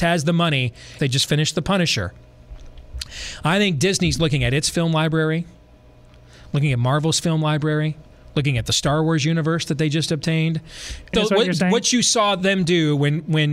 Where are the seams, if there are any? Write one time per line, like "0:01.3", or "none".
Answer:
0:01.0
0:11.1